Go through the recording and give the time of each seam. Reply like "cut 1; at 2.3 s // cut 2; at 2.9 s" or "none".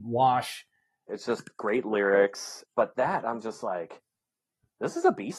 cut 1; at 1.1 s // cut 2; at 2.6 s